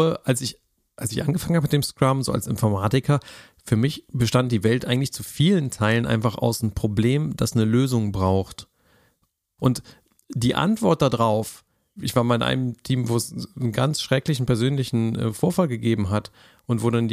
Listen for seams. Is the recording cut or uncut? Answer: cut